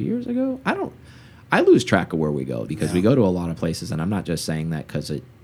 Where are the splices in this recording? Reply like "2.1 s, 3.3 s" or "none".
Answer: 2.7 s